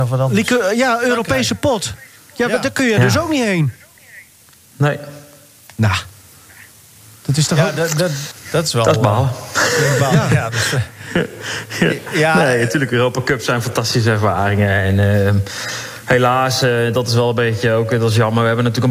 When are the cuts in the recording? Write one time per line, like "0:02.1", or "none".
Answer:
0:08.3